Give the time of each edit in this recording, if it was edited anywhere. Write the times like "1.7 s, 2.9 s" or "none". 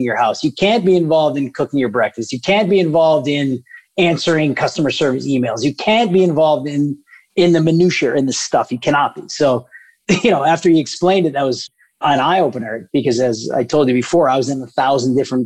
none

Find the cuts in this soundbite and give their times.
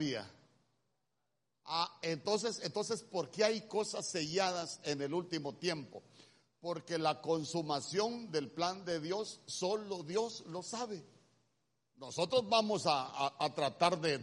none

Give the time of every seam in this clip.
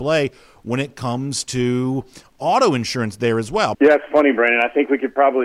3.7 s

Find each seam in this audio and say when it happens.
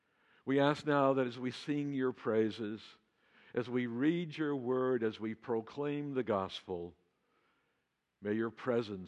none

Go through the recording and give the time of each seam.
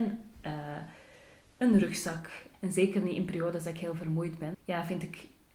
2.5 s, 4.5 s

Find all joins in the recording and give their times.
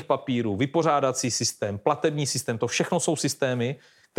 none

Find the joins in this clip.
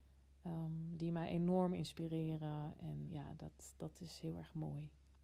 3.1 s

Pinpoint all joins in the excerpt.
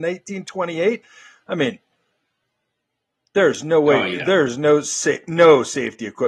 none

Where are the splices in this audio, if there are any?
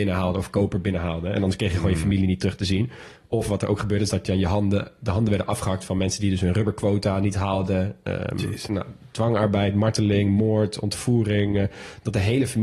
8.7 s

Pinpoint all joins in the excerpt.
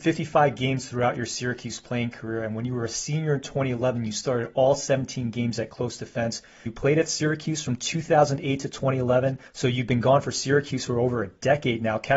6.7 s, 9.5 s

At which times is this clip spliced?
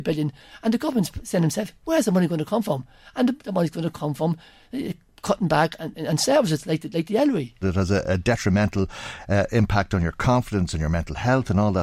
3.4 s, 7.6 s

